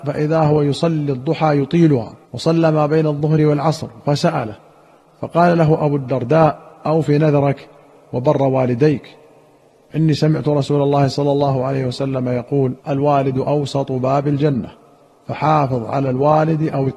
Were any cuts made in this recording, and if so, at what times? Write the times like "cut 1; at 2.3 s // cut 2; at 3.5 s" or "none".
cut 1; at 2.2 s // cut 2; at 12.8 s